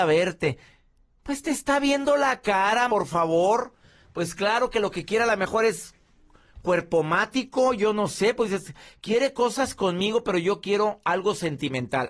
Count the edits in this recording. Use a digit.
1